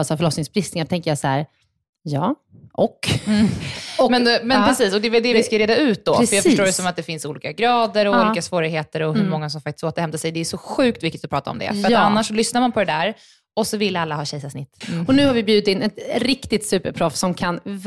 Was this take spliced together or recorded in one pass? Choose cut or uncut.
cut